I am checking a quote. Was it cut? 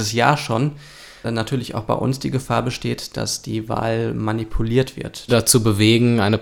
yes; 2 cuts; at 1.2 s, 5.3 s

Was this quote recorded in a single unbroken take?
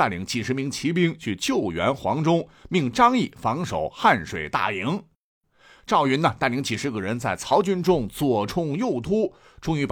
yes; 0 cuts

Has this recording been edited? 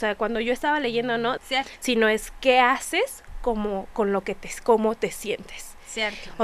yes; 1 cut; at 1.4 s

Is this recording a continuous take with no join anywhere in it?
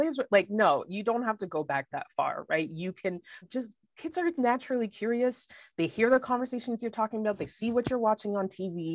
no; 1 cut; at 3.4 s

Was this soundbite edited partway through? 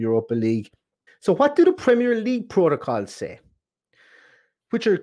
yes; 1 cut; at 1.1 s

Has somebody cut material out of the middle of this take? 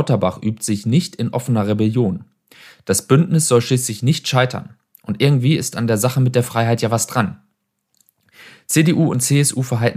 no; 0 cuts

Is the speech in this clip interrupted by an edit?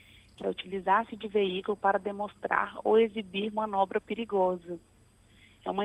no; 0 cuts

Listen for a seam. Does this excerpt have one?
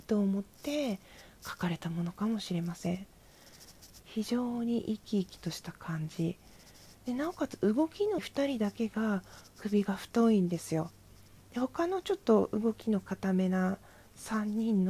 yes; 2 cuts; at 4.0 s, 8.2 s

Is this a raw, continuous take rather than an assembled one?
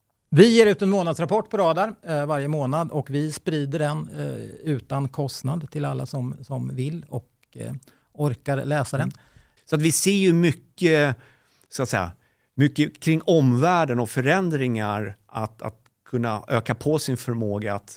no; 1 cut; at 9.6 s

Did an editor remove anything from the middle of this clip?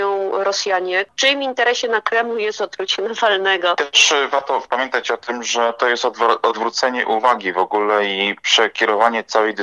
no; 0 cuts

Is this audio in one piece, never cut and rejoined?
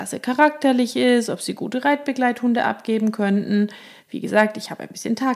yes; 0 cuts

